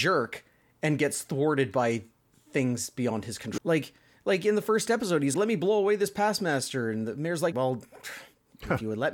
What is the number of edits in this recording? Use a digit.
3